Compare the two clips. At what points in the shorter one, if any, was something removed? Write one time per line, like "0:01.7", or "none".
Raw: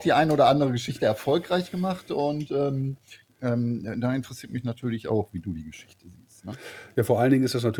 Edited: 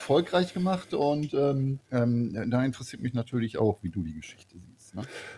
0:01.8